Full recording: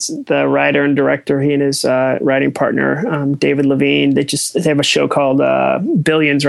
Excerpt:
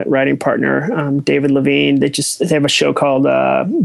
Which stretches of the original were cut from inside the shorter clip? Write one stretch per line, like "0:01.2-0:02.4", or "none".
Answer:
none